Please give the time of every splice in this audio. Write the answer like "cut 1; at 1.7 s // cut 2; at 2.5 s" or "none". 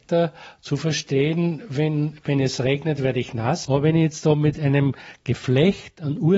cut 1; at 3.6 s